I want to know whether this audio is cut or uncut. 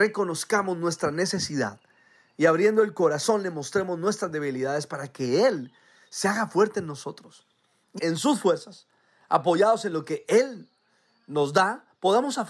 cut